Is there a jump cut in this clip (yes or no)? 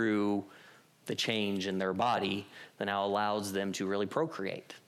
no